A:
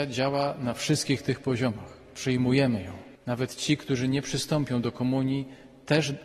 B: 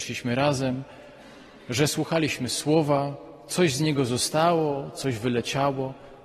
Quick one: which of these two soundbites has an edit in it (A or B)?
A